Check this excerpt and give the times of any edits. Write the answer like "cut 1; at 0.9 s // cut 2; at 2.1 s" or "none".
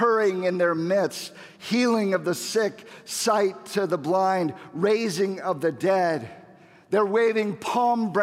none